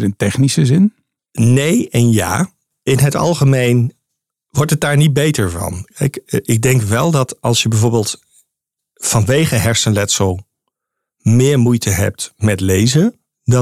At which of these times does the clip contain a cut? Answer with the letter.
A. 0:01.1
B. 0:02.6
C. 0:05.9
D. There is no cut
D